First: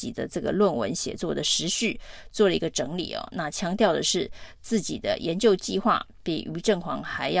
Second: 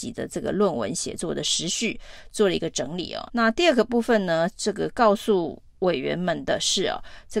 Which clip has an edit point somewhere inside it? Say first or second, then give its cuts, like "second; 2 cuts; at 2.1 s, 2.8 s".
second; 1 cut; at 3.3 s